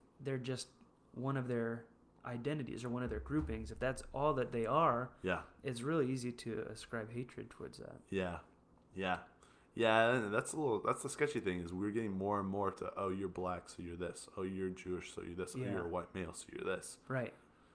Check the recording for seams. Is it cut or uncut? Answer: uncut